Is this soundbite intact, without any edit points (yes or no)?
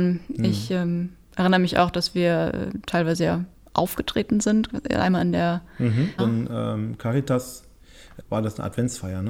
no